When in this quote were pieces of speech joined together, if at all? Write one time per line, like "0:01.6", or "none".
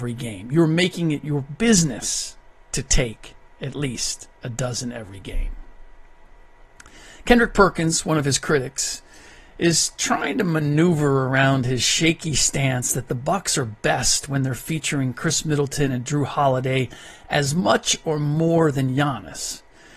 none